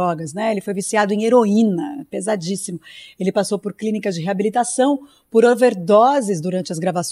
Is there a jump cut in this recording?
no; 0 cuts

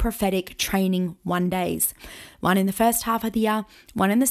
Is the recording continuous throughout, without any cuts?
yes; 0 cuts

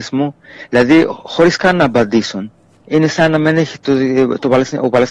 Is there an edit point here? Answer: yes; 1 cut; at 2.8 s

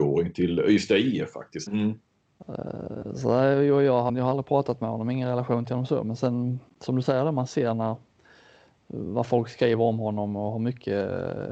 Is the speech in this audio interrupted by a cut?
yes; 2 cuts; at 1.7 s, 4.1 s

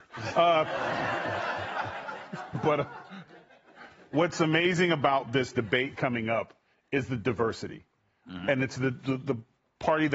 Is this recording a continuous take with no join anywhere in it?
yes; 0 cuts

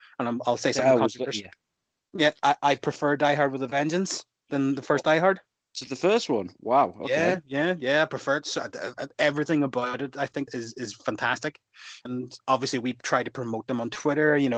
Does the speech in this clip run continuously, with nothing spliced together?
no; 2 cuts; at 10.5 s, 12.1 s

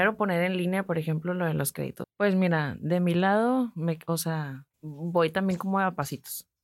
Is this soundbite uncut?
no; 2 cuts; at 2.0 s, 4.7 s

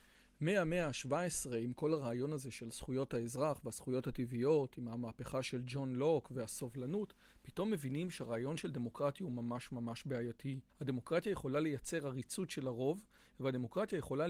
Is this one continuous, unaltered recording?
no; 1 cut; at 10.7 s

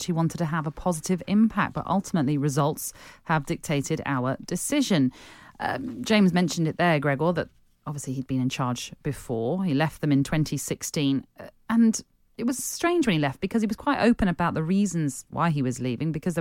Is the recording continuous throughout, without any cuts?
yes; 0 cuts

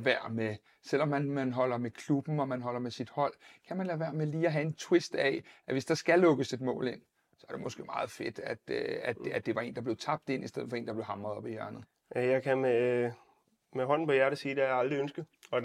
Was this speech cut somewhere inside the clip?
no; 0 cuts

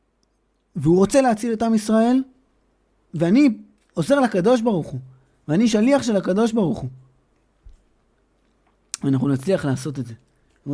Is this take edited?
yes; 1 cut; at 3.1 s

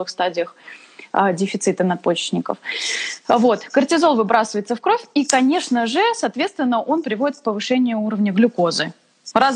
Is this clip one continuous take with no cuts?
yes; 0 cuts

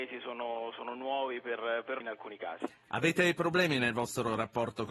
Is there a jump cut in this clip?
yes; 1 cut; at 2.0 s

